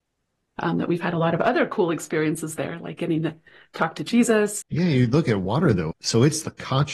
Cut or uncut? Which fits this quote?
cut